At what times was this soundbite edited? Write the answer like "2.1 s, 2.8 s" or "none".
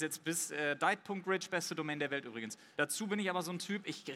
2.7 s